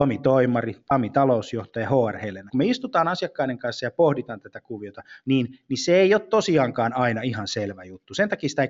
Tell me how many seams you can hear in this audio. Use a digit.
2